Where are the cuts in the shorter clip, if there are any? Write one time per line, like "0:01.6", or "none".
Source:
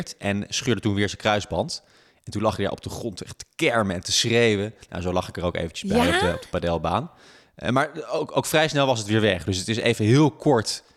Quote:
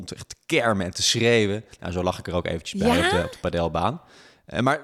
none